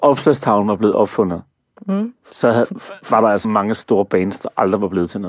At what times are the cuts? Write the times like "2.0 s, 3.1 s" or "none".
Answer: 3.4 s